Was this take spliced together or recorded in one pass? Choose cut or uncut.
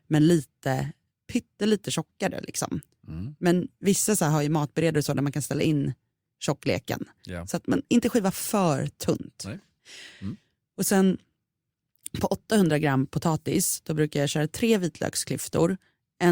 uncut